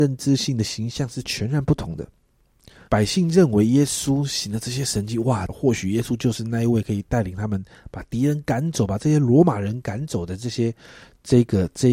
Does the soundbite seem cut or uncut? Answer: cut